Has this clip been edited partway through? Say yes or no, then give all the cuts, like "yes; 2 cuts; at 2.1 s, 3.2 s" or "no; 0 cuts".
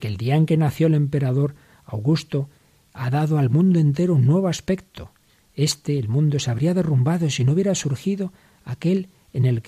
no; 0 cuts